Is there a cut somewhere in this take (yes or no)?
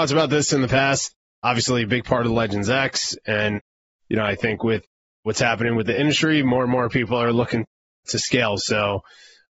no